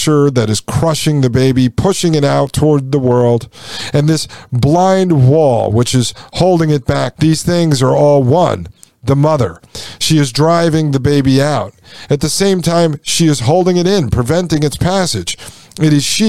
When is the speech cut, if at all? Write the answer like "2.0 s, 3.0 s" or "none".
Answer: 7.2 s

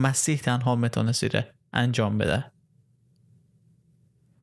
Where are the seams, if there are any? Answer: none

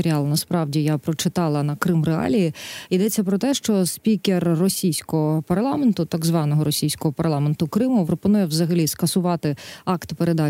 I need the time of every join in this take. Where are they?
8.1 s

